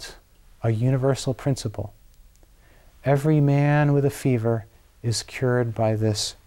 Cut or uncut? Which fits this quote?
uncut